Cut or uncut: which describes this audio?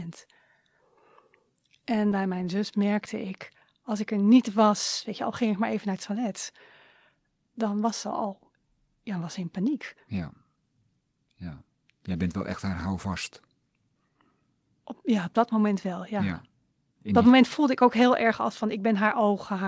uncut